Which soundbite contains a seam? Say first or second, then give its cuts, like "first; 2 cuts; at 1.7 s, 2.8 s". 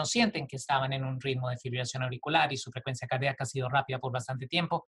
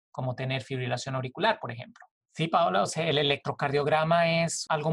second; 1 cut; at 2.2 s